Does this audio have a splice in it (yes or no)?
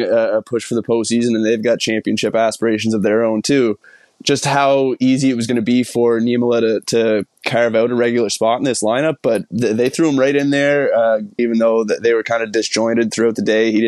yes